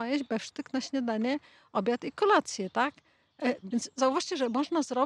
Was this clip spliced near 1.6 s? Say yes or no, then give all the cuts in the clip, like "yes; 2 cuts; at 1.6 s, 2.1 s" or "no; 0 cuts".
no; 1 cut; at 3.6 s